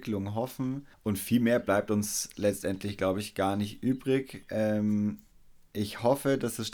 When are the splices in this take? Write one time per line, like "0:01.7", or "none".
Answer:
0:00.9